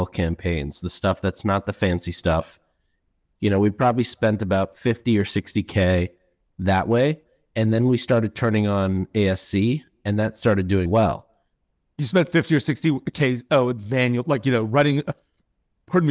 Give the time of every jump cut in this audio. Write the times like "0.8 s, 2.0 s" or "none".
10.9 s